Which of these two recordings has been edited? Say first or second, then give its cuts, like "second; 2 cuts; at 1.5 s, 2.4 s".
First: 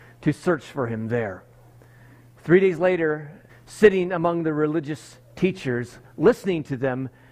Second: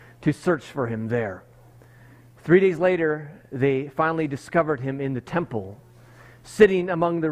first; 1 cut; at 3.5 s